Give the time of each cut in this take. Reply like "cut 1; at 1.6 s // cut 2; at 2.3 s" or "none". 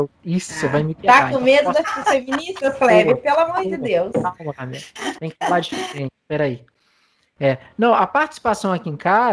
none